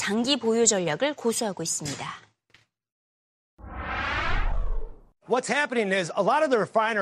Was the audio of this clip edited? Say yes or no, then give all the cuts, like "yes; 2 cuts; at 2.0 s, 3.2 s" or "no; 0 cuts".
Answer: no; 0 cuts